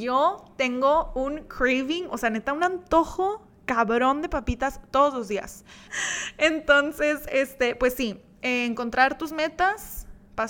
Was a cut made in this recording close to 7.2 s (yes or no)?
no